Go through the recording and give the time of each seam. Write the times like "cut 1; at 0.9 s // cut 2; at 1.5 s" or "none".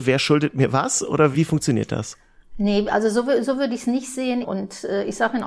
cut 1; at 1.3 s // cut 2; at 4.4 s